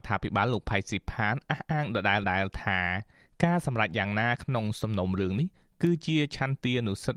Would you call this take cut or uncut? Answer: cut